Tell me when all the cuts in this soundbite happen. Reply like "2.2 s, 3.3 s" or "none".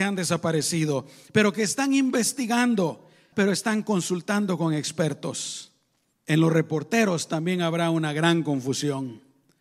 3.3 s, 6.1 s